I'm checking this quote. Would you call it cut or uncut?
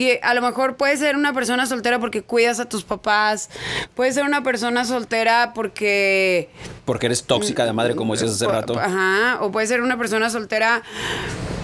uncut